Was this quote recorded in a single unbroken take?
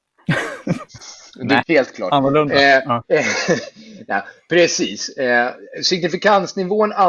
no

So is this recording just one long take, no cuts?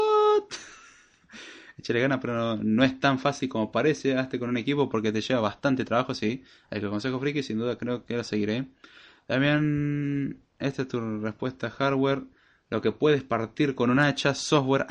yes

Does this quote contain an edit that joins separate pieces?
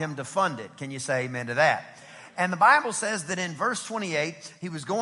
no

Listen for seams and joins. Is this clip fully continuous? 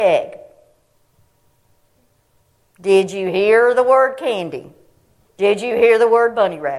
no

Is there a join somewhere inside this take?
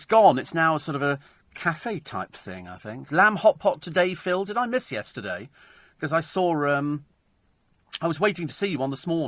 yes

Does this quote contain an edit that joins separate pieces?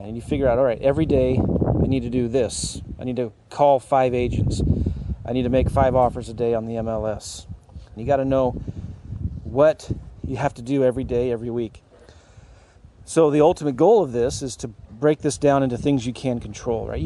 yes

